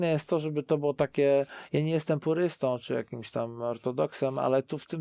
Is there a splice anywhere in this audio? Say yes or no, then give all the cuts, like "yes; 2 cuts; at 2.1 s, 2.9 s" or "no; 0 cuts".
no; 0 cuts